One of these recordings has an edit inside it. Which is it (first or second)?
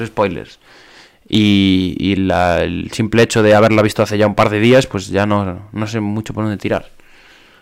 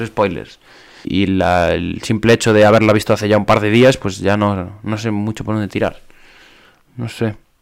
second